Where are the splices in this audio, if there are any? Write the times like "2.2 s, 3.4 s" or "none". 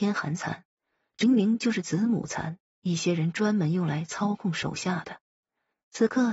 1.2 s, 2.7 s